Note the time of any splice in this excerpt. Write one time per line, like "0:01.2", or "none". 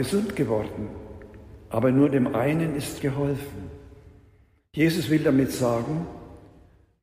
0:03.0